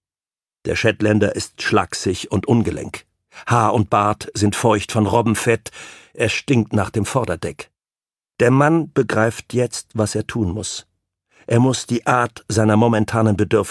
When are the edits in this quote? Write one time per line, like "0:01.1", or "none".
none